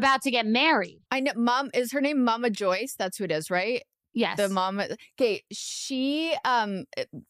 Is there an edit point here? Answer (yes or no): yes